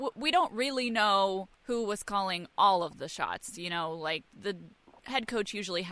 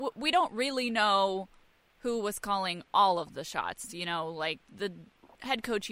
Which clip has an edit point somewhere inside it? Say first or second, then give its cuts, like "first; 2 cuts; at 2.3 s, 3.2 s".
first; 1 cut; at 1.5 s